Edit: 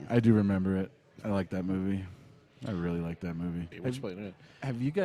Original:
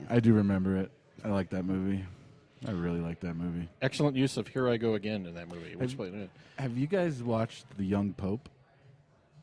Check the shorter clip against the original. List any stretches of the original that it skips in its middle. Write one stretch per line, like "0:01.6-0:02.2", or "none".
0:03.7-0:05.7